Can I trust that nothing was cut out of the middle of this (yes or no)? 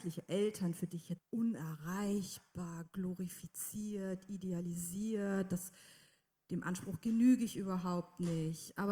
no